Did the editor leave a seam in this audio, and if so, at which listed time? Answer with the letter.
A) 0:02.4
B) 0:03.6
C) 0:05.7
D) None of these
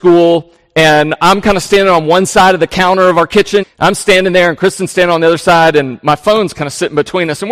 B